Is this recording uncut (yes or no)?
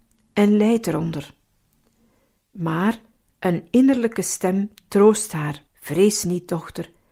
no